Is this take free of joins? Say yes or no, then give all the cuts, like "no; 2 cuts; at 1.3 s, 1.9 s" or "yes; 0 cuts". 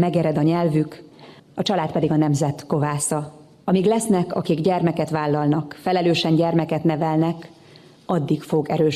no; 1 cut; at 1.4 s